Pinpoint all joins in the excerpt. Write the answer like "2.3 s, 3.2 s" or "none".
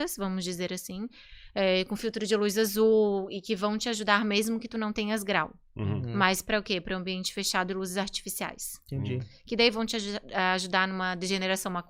none